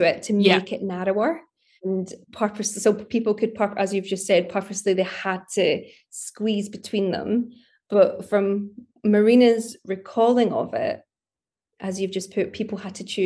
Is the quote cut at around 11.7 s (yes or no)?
no